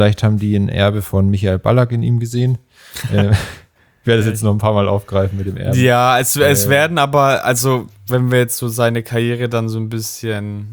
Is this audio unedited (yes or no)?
yes